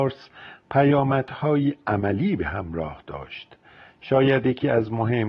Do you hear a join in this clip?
no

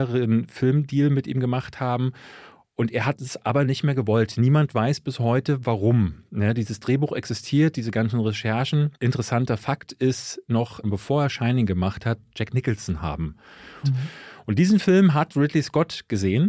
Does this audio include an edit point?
yes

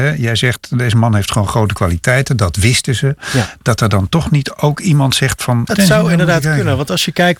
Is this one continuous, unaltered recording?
no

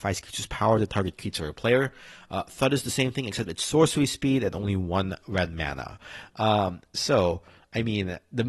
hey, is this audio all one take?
yes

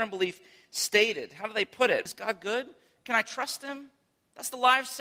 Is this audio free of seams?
no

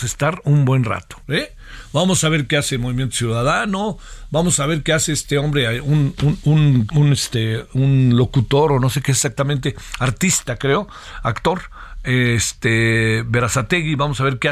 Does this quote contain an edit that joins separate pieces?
yes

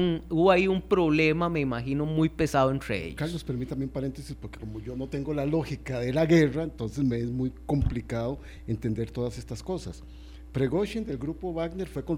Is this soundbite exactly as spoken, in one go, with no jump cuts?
yes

